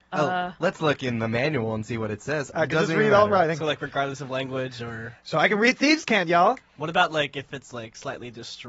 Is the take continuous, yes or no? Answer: no